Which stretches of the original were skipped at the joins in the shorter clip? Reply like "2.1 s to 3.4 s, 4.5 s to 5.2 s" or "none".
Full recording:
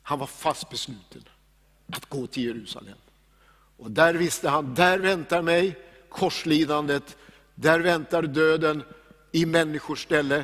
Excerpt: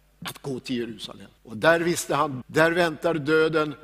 3.0 s to 3.7 s, 4.8 s to 7.5 s